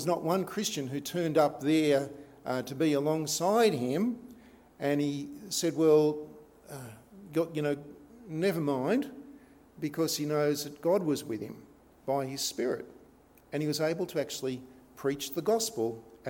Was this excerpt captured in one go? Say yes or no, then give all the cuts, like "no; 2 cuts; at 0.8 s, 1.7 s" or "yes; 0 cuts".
yes; 0 cuts